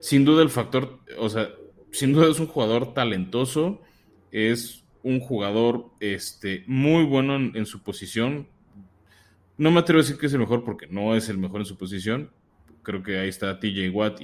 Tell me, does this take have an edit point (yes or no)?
no